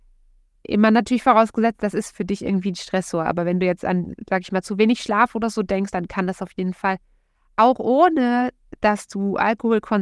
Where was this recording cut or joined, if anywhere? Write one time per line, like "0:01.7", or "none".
none